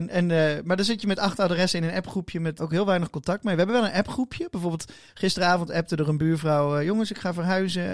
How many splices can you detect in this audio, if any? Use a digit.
1